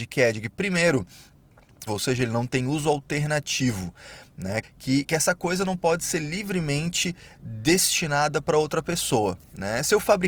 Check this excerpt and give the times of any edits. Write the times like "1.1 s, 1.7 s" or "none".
1.9 s, 4.6 s